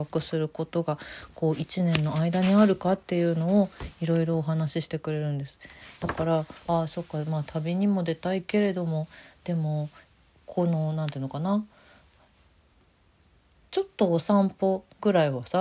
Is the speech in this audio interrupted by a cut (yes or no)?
yes